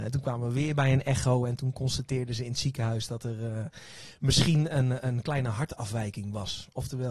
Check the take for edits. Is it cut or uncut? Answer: uncut